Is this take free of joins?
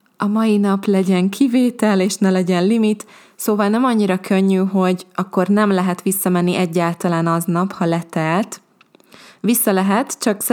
yes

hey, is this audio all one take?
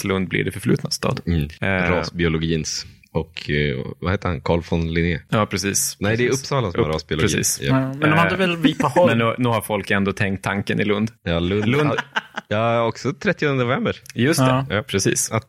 yes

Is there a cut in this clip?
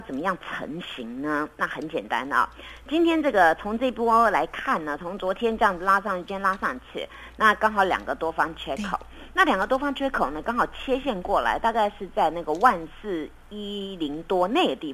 no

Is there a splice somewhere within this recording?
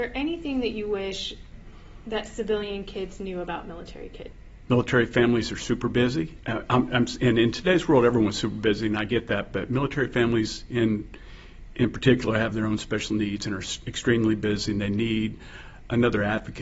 yes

